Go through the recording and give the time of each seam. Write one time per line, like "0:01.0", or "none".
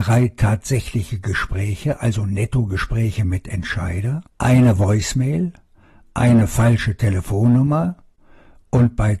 0:04.3